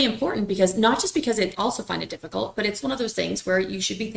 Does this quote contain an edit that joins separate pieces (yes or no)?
yes